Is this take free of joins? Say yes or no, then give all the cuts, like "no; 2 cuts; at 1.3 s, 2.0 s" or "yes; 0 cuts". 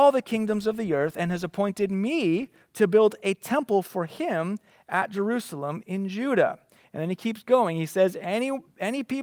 yes; 0 cuts